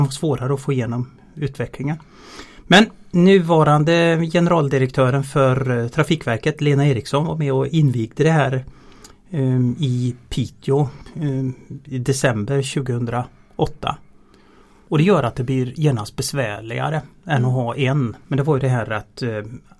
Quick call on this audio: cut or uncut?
cut